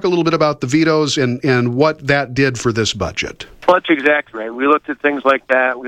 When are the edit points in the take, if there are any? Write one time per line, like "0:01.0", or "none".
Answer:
none